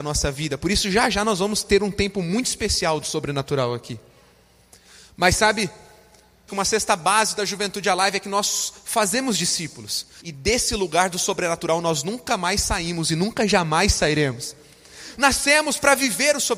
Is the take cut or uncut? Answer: cut